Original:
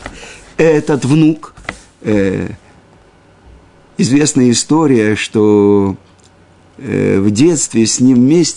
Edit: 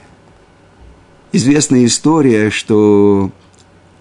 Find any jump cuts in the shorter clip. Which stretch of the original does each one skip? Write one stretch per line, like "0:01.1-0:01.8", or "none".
none